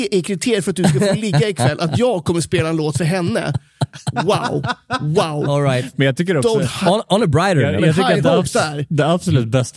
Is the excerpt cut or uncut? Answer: cut